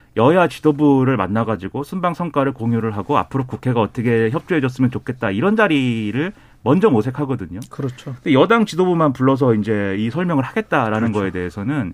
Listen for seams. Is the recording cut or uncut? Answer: uncut